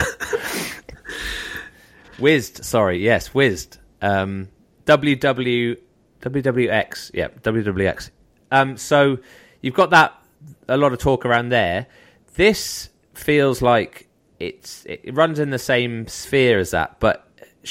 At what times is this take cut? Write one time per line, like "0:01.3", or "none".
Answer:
none